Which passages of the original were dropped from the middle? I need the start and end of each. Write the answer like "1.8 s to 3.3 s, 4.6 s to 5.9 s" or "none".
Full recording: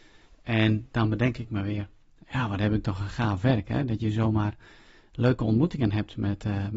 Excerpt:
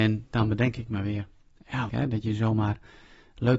2.5 s to 3.6 s